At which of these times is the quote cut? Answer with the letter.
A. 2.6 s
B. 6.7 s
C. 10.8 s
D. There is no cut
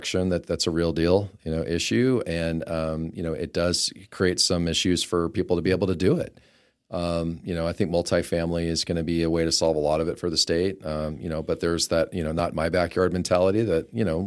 D